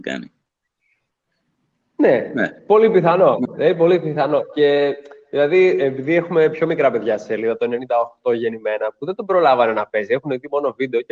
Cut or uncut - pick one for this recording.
uncut